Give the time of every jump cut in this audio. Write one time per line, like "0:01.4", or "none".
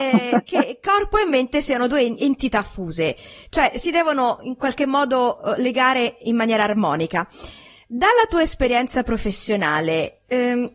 none

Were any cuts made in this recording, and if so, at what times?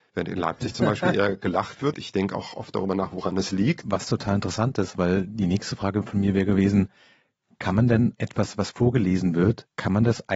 0:01.9
0:03.8

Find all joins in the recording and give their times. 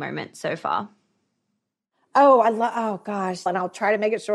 0:03.5

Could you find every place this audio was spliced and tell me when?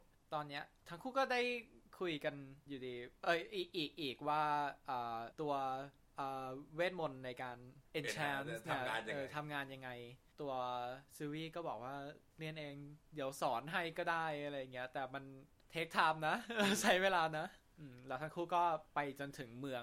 none

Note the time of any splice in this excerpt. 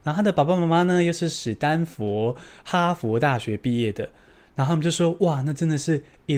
none

